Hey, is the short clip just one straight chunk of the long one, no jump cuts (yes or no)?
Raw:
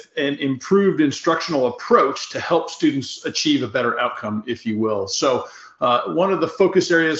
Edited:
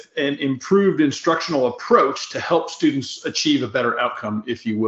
yes